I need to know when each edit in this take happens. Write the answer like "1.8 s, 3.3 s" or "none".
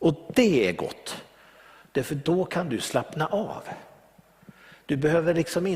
none